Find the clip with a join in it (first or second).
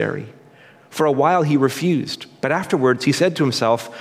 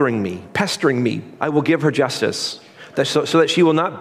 second